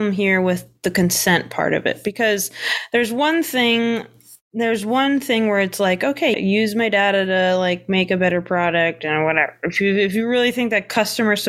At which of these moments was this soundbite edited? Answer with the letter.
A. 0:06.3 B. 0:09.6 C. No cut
A